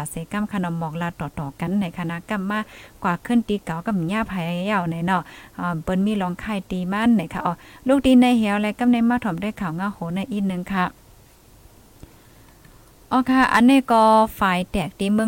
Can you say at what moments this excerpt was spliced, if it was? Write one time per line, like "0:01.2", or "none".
none